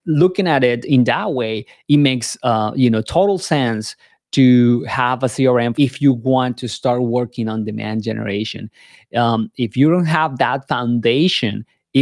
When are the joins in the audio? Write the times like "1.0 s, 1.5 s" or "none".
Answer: 5.7 s